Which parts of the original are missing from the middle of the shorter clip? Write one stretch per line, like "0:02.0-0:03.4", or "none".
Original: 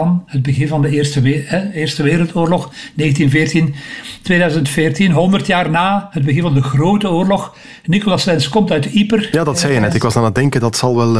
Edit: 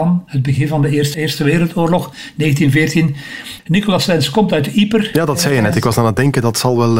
0:01.1-0:01.7
0:04.2-0:07.8